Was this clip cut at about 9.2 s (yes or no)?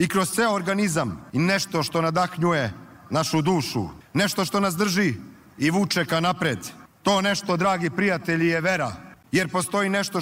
yes